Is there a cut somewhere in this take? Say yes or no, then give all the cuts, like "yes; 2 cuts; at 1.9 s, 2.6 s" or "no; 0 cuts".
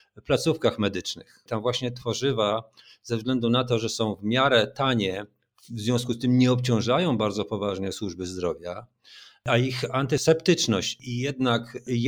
yes; 1 cut; at 1.5 s